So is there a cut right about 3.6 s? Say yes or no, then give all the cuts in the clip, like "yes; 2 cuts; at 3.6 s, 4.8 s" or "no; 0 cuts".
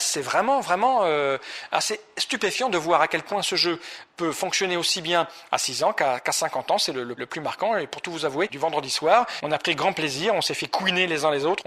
no; 2 cuts; at 7.2 s, 8.5 s